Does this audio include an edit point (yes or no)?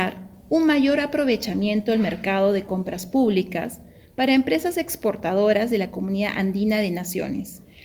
no